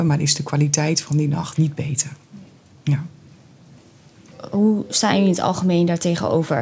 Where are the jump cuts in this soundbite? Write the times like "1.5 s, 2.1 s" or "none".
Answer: 1.5 s

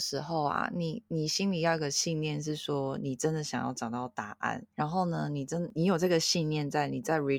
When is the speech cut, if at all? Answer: 4.7 s

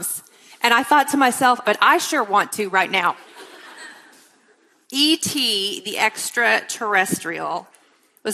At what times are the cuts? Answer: 1.6 s

